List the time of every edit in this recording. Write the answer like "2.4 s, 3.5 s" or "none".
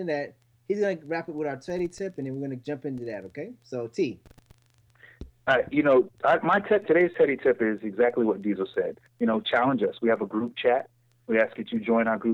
9.1 s